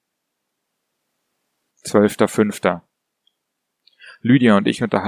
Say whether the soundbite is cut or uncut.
cut